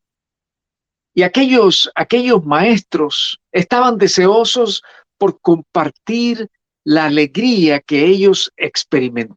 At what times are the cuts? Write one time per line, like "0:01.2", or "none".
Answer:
0:03.4